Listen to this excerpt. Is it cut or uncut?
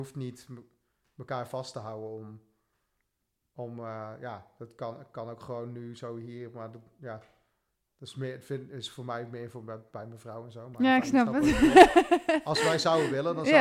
uncut